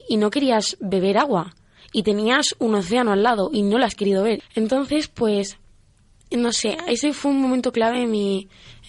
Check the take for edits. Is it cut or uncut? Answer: uncut